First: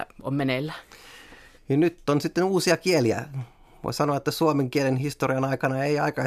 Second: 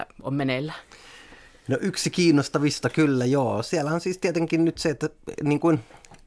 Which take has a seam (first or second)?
first